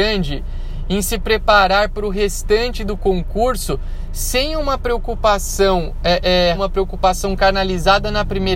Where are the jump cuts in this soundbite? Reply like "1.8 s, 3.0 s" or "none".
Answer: 6.5 s